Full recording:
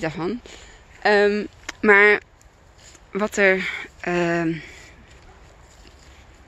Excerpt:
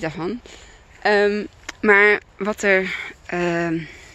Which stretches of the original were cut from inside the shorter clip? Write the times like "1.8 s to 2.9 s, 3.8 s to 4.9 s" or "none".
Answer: 2.3 s to 3.0 s